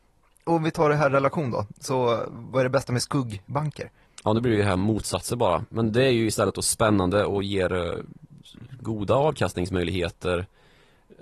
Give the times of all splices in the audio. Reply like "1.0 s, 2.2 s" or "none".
none